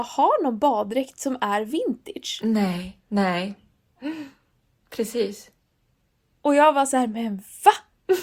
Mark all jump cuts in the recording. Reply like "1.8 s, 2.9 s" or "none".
none